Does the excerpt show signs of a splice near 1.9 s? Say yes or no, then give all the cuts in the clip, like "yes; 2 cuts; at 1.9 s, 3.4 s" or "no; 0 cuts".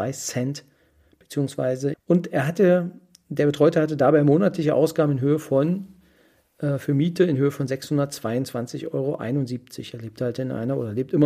yes; 1 cut; at 1.9 s